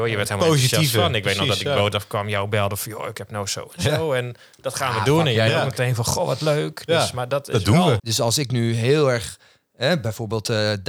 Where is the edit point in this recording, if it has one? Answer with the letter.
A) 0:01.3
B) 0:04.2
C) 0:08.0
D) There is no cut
C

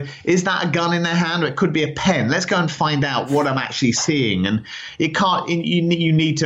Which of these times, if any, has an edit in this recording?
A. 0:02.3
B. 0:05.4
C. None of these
C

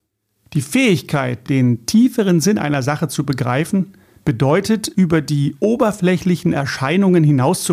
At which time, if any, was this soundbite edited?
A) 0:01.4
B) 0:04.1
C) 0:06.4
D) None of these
D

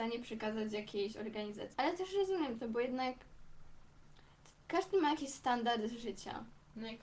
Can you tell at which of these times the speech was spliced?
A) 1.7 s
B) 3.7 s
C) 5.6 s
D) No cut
A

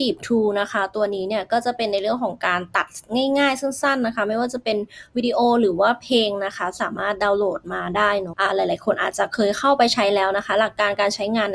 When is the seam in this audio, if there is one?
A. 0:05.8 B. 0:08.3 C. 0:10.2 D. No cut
B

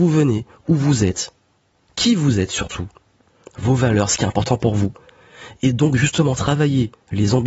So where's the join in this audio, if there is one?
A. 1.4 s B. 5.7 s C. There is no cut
C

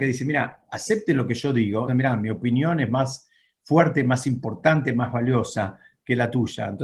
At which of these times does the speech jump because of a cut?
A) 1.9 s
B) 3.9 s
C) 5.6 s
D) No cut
A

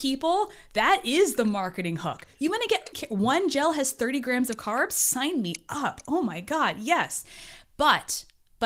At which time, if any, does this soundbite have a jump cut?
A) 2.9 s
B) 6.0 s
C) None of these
A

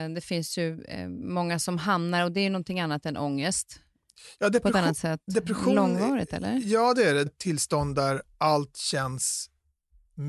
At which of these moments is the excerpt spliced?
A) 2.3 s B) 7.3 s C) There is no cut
B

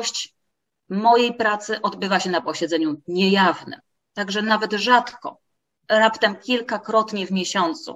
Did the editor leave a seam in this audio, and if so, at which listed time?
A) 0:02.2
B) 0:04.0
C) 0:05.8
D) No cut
D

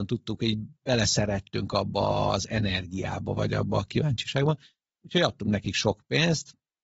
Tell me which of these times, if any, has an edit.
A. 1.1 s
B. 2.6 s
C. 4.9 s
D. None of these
D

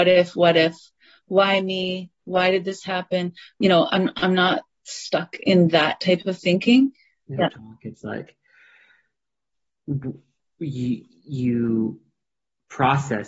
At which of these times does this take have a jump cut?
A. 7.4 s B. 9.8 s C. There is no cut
A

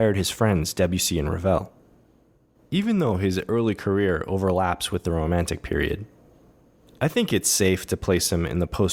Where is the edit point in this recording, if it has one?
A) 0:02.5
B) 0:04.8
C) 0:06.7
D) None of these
A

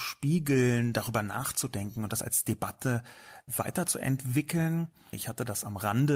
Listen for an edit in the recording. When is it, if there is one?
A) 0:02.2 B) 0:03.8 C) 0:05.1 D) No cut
C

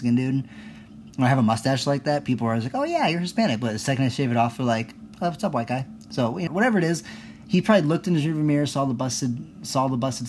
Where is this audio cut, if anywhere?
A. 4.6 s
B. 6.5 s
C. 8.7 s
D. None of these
B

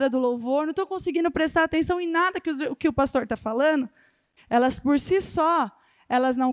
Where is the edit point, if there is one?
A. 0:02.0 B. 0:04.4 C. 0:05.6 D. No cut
B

